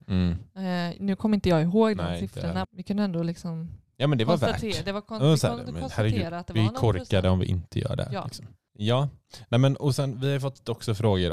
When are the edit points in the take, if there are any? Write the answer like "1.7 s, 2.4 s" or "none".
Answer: 2.6 s, 8.7 s